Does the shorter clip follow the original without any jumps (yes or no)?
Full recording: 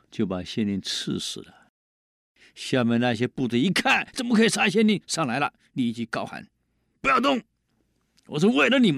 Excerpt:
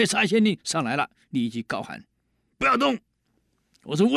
yes